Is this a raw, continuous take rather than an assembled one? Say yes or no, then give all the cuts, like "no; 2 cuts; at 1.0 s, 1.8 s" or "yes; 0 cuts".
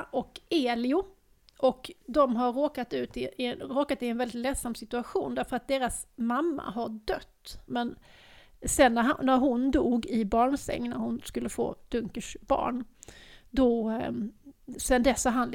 no; 1 cut; at 7.7 s